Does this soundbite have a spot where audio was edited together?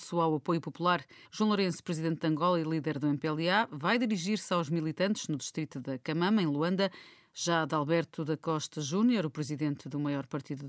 yes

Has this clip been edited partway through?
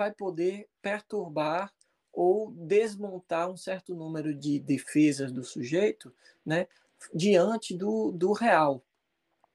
no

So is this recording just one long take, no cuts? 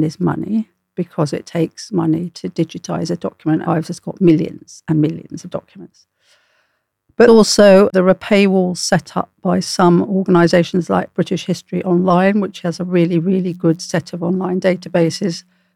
no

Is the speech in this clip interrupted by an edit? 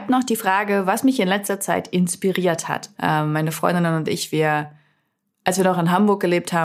yes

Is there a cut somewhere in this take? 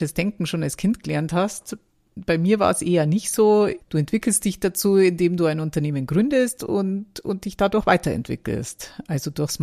yes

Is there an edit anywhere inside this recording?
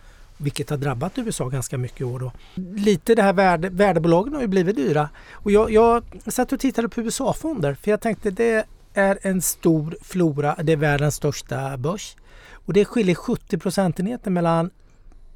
no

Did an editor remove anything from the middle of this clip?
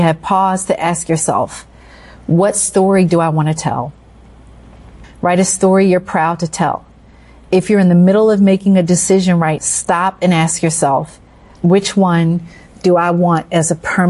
yes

